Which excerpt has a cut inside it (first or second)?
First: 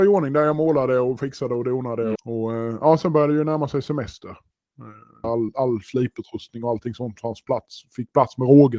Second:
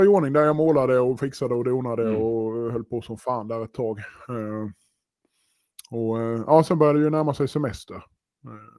first